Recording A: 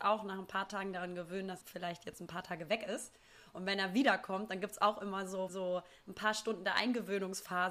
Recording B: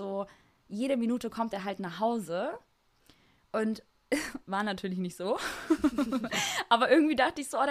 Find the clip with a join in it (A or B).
A